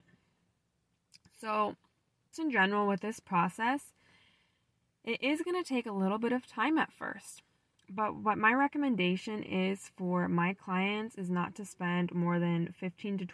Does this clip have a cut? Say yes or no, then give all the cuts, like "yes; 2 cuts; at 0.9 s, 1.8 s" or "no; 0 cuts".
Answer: yes; 1 cut; at 2.3 s